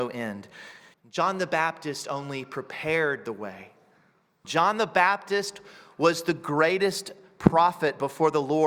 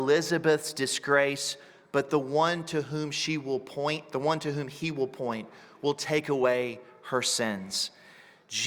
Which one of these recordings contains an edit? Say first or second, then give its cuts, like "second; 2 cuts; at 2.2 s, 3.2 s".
first; 2 cuts; at 0.9 s, 4.4 s